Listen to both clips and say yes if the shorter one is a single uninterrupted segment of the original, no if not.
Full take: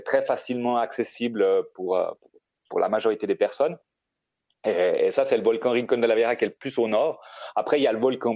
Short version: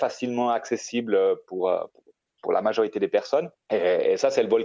no